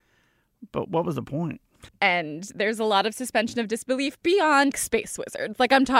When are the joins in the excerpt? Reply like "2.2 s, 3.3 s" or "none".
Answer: 1.9 s, 4.7 s